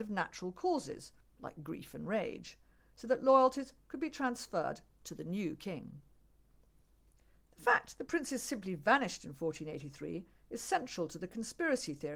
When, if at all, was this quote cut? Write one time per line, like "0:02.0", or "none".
none